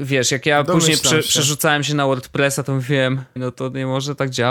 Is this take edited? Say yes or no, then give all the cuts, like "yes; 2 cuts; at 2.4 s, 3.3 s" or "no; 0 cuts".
yes; 1 cut; at 3.4 s